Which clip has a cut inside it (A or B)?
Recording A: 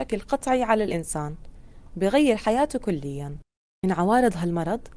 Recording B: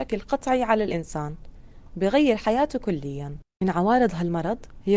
B